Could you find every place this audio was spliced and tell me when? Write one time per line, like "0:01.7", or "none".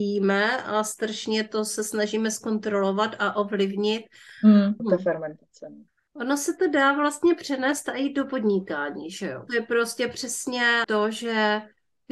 0:04.8
0:09.5
0:10.8